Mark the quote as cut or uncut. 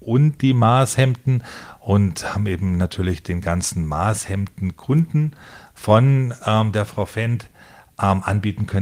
uncut